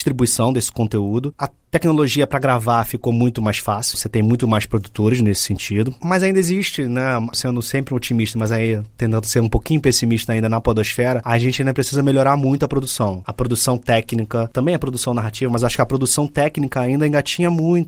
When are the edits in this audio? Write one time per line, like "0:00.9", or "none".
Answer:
0:03.9